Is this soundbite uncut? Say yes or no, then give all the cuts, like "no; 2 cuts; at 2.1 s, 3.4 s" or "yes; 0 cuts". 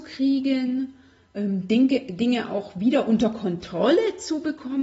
yes; 0 cuts